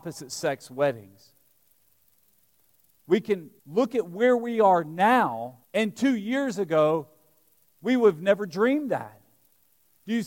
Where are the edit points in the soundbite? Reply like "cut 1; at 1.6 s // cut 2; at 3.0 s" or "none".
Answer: cut 1; at 3.6 s // cut 2; at 5.6 s